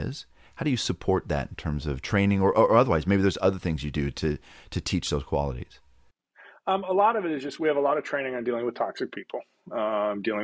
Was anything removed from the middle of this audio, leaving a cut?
no; 0 cuts

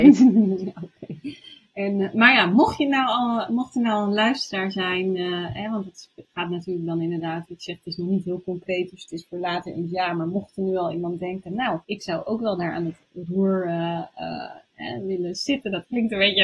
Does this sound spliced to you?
yes; 2 cuts; at 6.2 s, 11.8 s

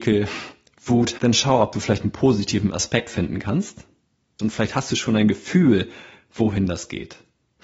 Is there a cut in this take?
yes; 2 cuts; at 1.2 s, 4.4 s

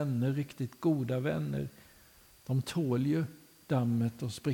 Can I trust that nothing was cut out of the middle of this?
yes; 0 cuts

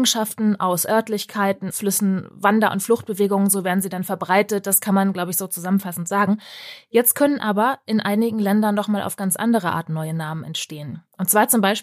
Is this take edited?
yes; 1 cut; at 1.7 s

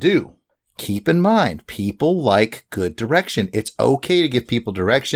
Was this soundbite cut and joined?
no; 0 cuts

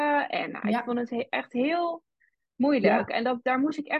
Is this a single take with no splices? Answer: yes; 0 cuts

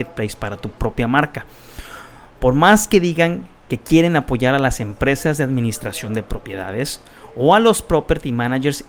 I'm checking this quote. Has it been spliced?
no; 0 cuts

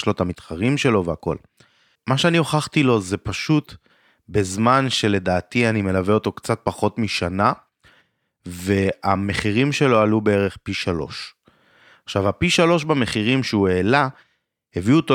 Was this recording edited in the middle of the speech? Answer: yes; 1 cut; at 2.0 s

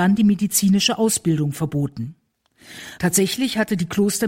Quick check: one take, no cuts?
no; 1 cut; at 3.0 s

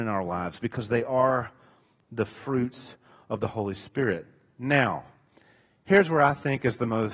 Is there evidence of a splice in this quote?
no; 0 cuts

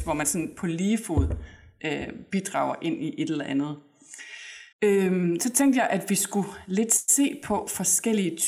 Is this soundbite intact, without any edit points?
no; 1 cut; at 4.7 s

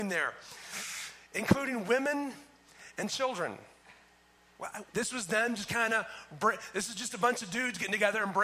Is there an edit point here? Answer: yes; 1 cut; at 4.9 s

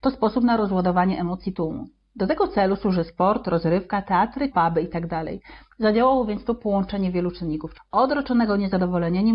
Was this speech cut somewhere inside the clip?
yes; 3 cuts; at 4.5 s, 5.7 s, 7.7 s

